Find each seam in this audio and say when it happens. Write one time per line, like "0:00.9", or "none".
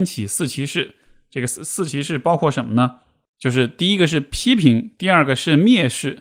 none